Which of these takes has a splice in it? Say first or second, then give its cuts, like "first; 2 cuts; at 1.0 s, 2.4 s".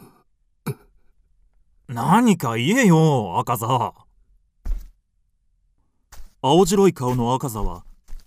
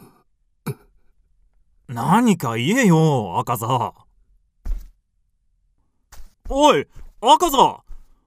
second; 1 cut; at 6.3 s